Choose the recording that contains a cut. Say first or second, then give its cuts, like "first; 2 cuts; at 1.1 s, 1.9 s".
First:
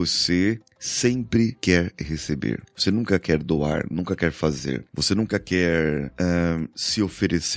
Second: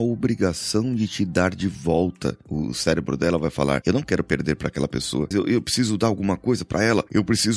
second; 1 cut; at 5.3 s